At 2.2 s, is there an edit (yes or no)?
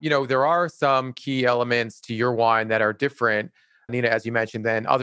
no